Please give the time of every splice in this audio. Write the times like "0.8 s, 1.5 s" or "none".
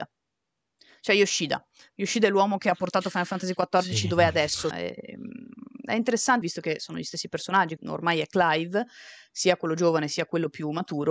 4.7 s, 6.4 s, 7.8 s